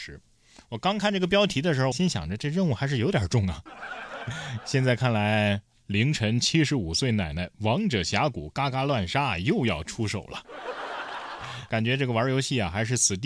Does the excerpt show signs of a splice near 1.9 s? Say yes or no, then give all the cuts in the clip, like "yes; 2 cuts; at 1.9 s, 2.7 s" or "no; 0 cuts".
yes; 1 cut; at 1.9 s